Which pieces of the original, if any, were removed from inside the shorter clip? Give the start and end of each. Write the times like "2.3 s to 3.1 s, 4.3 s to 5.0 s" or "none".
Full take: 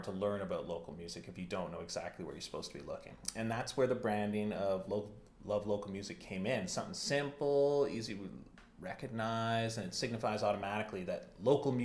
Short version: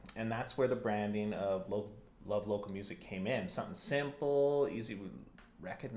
none